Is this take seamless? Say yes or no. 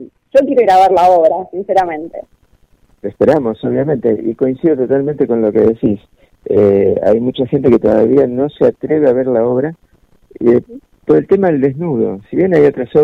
yes